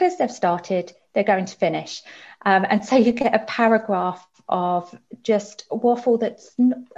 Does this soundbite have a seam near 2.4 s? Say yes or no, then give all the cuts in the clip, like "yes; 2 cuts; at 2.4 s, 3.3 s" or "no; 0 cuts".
no; 0 cuts